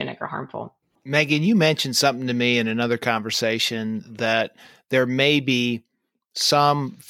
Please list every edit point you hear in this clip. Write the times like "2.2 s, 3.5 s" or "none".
1.0 s